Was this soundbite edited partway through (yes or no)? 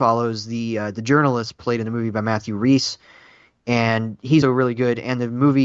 yes